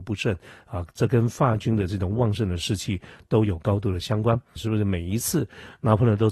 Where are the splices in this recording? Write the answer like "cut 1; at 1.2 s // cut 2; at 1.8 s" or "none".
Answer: cut 1; at 4.6 s